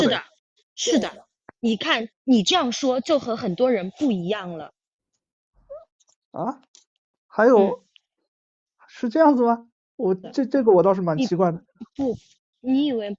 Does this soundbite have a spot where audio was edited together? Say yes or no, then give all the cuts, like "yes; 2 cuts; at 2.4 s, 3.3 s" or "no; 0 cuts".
yes; 1 cut; at 10.2 s